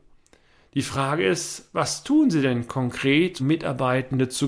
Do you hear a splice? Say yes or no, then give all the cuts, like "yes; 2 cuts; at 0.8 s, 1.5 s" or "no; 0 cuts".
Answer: yes; 1 cut; at 3.4 s